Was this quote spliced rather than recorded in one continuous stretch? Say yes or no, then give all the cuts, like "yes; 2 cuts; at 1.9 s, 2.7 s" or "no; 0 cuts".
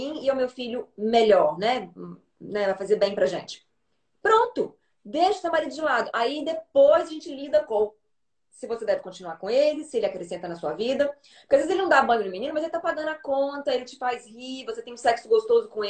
no; 0 cuts